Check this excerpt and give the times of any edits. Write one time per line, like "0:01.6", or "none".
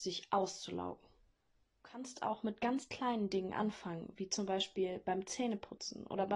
0:01.8

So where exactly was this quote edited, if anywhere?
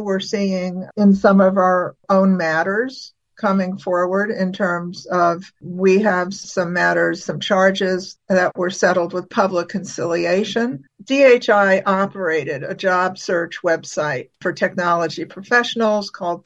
0:10.9

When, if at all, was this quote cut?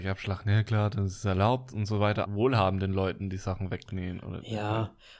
0:02.2

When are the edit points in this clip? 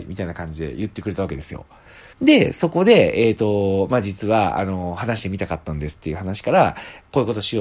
0:02.1

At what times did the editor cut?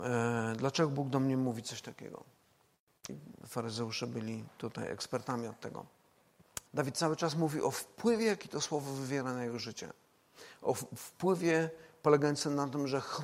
0:03.1
0:06.7

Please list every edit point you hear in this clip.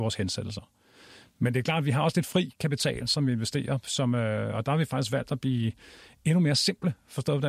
none

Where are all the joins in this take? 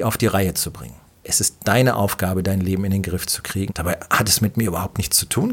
0:01.2
0:03.7

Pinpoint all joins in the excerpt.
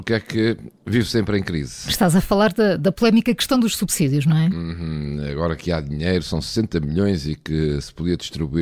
none

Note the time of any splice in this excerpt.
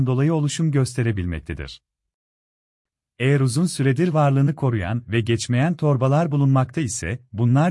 none

